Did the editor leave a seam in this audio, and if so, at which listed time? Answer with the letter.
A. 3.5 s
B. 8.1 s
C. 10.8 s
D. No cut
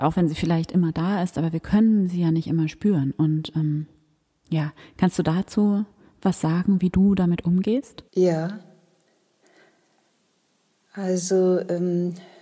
B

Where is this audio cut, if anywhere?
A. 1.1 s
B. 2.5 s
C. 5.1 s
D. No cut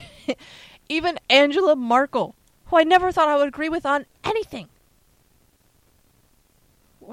B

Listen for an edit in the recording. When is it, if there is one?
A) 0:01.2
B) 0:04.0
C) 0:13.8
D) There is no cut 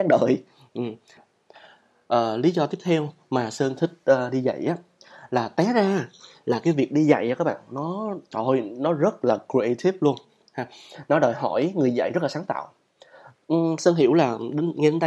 A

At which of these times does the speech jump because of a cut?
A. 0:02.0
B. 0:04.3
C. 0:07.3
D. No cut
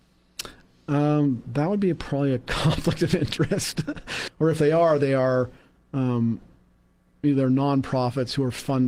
B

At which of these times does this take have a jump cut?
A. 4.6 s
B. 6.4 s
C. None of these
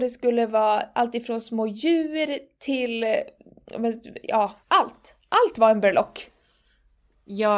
A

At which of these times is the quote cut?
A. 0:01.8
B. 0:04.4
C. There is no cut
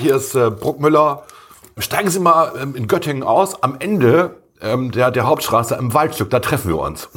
A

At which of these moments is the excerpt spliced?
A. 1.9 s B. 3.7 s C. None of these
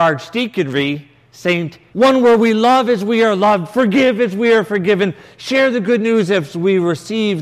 A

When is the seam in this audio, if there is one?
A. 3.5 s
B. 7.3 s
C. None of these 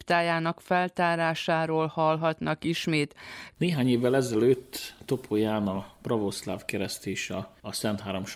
A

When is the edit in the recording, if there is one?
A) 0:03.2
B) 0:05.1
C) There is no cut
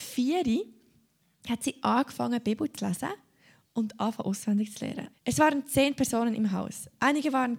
B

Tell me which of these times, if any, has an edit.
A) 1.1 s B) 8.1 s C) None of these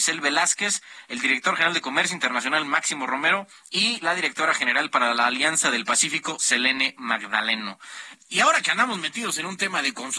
B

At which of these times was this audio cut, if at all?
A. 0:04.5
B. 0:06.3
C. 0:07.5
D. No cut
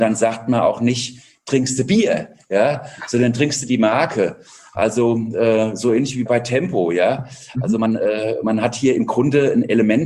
B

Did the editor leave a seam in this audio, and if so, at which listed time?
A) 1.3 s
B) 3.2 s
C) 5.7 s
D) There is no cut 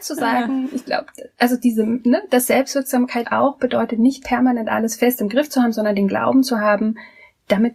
B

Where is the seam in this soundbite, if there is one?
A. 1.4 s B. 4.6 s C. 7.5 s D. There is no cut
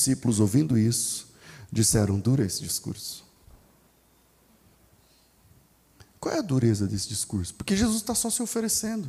D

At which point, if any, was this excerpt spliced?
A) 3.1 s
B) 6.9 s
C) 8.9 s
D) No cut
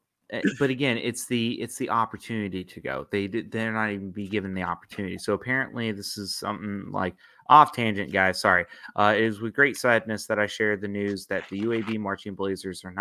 D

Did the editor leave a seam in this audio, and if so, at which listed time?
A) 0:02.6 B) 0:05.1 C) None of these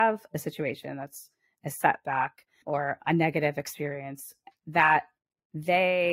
A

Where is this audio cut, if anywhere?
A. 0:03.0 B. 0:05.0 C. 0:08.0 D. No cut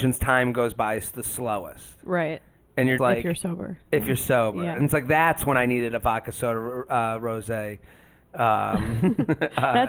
A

